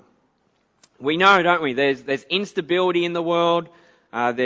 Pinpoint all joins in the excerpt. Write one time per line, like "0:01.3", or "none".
none